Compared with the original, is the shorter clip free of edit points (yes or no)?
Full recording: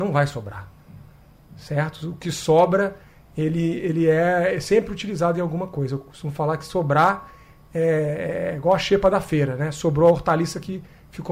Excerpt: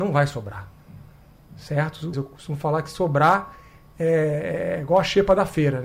no